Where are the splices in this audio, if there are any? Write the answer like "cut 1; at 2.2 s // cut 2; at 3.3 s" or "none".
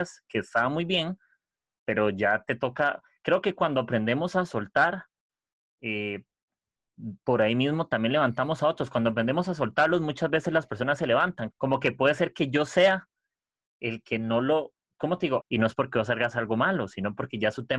cut 1; at 11.5 s // cut 2; at 15.4 s